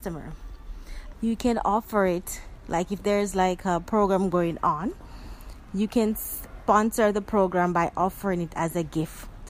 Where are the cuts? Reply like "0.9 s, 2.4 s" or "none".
1.1 s